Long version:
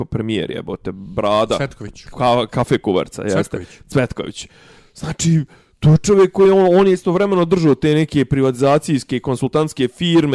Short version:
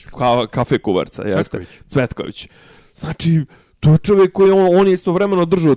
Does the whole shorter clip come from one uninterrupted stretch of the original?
yes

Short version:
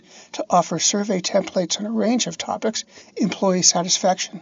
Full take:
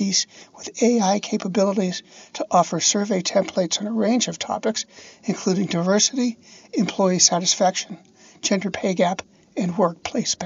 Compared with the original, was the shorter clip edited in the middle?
yes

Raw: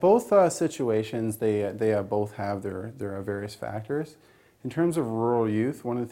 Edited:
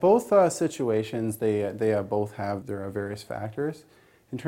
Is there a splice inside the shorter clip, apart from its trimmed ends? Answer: yes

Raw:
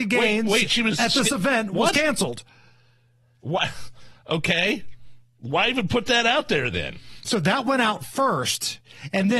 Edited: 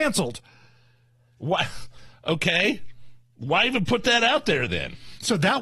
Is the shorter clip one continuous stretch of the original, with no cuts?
yes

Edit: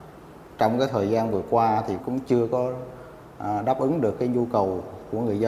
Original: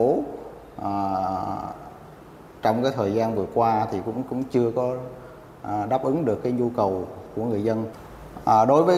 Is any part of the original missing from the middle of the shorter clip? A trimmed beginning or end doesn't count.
yes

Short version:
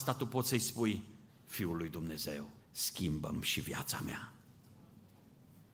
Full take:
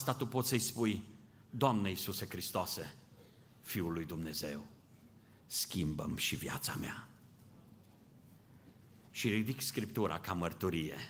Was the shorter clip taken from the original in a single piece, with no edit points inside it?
no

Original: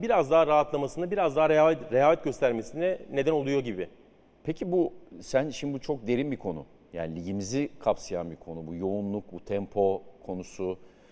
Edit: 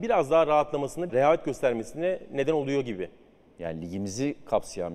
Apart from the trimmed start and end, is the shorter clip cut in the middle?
yes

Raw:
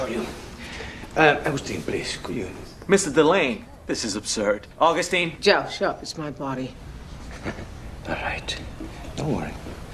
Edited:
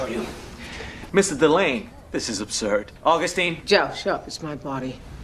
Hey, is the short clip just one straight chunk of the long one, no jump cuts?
no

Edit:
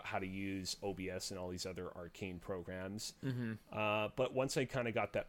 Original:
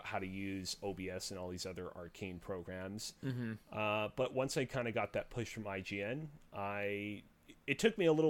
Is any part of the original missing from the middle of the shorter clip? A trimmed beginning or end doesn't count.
no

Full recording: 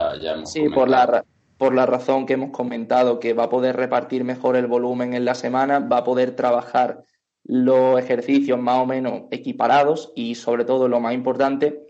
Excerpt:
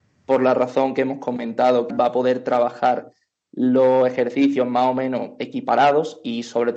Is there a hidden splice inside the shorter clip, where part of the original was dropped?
yes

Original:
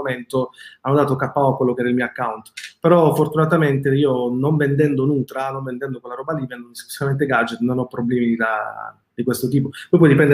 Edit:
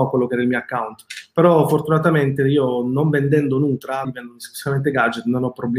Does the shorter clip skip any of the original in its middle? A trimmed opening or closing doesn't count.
yes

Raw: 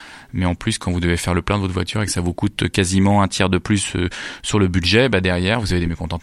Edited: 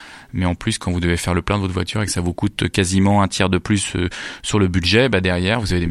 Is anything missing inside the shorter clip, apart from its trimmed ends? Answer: no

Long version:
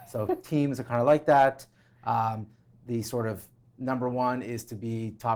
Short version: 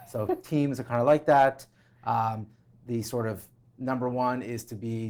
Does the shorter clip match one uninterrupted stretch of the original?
yes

